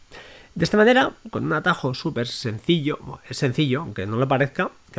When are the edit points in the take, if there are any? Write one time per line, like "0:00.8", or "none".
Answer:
none